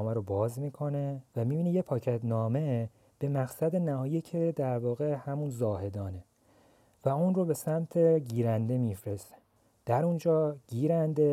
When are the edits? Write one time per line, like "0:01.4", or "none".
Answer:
0:01.3